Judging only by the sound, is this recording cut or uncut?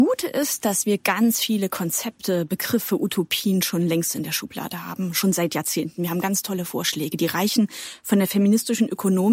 uncut